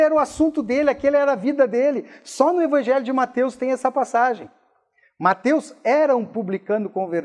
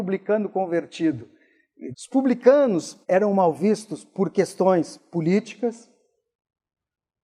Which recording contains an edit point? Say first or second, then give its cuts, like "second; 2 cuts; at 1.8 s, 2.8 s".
second; 2 cuts; at 1.9 s, 3.0 s